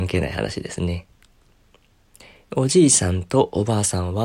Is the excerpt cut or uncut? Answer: uncut